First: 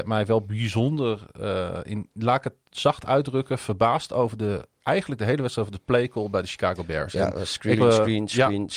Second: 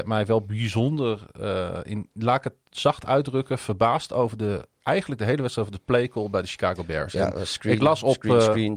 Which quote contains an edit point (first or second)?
first